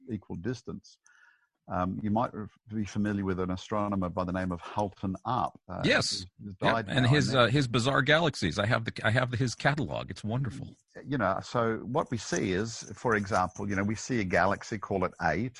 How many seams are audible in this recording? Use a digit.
0